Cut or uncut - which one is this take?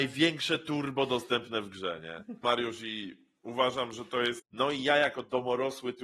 cut